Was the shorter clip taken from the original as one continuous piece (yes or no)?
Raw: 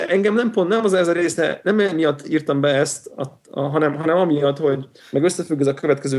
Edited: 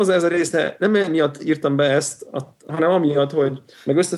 no